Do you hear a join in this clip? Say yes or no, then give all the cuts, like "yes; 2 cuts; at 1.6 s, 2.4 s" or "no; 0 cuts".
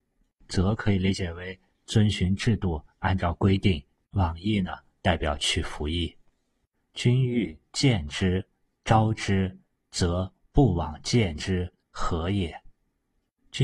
no; 0 cuts